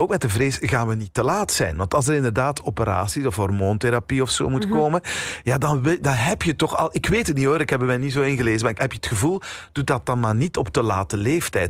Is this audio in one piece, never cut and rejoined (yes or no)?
no